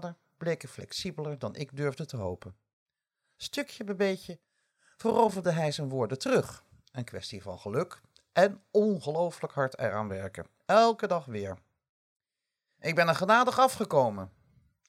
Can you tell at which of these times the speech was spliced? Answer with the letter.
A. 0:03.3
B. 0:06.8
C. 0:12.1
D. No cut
D